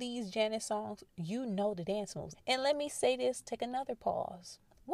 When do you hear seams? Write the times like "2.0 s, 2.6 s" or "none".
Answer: 2.3 s